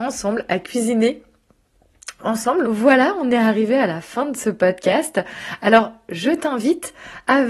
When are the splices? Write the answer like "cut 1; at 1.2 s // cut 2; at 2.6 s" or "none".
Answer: cut 1; at 2.6 s

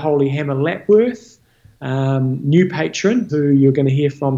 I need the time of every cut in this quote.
cut 1; at 3.3 s

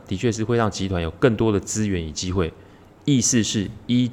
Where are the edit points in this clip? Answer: none

